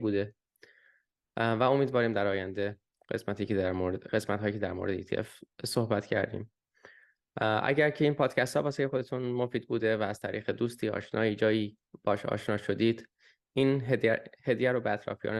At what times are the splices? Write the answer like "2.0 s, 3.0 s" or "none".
none